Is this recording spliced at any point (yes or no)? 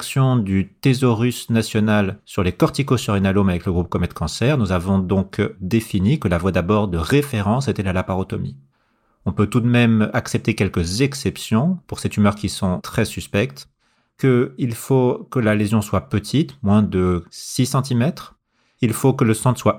no